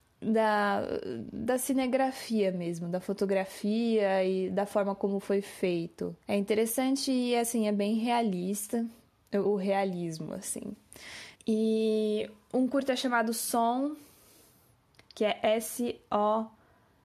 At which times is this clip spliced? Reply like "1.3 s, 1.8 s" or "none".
6.2 s, 9.4 s, 11.4 s